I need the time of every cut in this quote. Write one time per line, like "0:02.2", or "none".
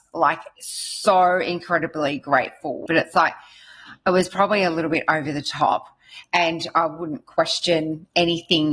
0:02.9

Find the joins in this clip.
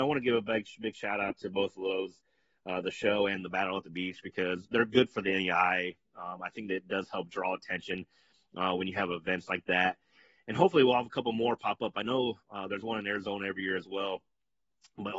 none

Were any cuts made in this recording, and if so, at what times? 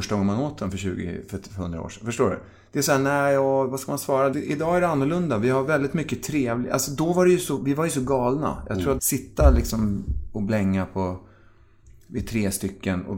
0:04.3
0:09.0

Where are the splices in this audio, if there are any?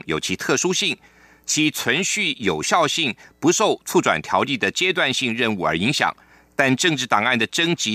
none

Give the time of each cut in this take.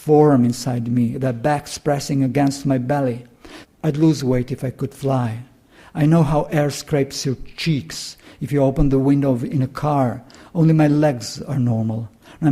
0:03.6

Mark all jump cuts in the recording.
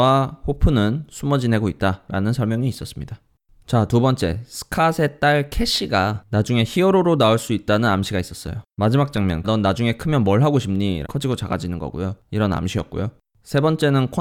0:09.4
0:11.0
0:12.2

